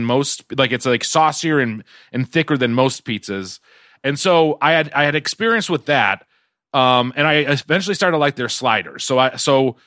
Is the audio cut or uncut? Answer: uncut